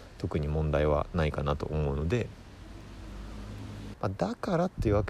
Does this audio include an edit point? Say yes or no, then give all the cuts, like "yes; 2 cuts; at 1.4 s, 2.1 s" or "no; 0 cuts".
yes; 1 cut; at 3.9 s